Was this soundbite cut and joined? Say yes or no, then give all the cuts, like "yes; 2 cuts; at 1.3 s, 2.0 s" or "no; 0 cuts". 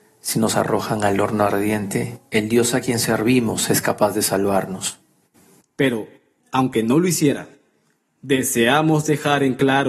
yes; 1 cut; at 5.6 s